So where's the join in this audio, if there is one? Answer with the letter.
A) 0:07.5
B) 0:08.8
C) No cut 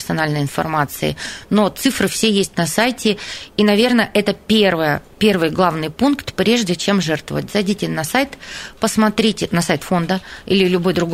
C